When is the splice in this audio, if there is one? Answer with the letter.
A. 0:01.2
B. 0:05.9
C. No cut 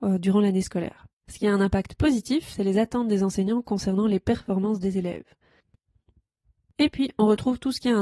A